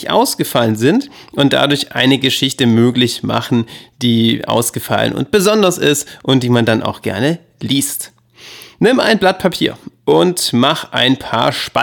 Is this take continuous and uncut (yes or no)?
yes